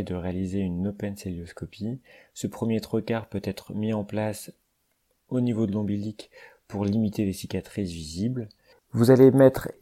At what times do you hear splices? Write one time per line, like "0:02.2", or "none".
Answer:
0:08.7